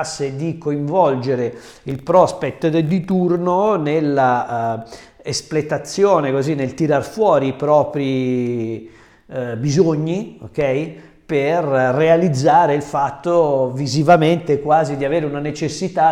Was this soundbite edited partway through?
no; 0 cuts

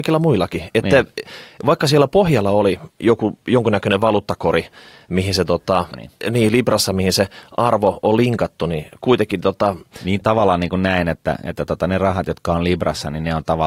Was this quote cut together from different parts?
yes; 2 cuts; at 5.9 s, 10.2 s

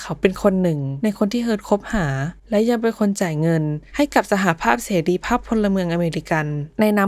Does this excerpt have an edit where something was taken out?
yes; 1 cut; at 2.4 s

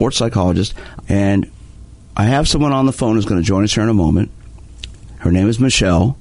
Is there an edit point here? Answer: yes; 2 cuts; at 1.0 s, 5.2 s

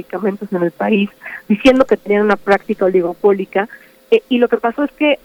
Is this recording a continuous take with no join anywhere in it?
yes; 0 cuts

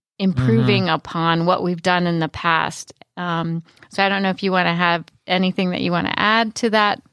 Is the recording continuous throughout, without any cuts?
yes; 0 cuts

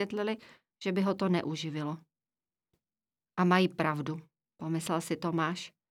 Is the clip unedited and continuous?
yes; 0 cuts

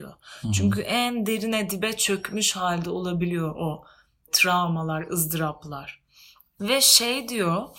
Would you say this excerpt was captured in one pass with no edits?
yes; 0 cuts

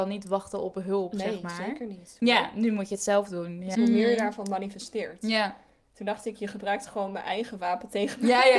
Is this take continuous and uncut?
no; 2 cuts; at 2.2 s, 3.7 s

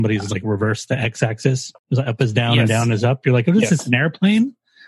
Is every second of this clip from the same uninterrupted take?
no; 1 cut; at 1.8 s

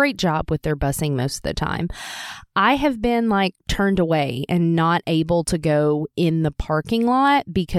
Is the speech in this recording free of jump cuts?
yes; 0 cuts

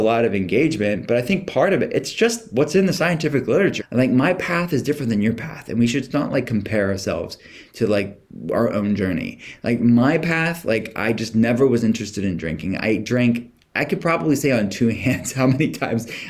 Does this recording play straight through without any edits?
no; 1 cut; at 3.8 s

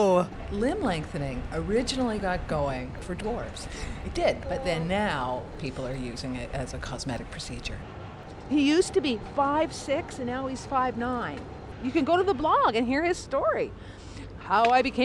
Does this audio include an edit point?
no; 0 cuts

